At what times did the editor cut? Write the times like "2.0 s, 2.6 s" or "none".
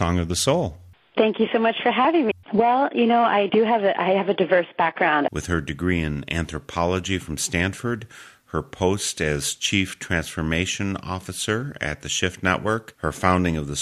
2.3 s, 5.3 s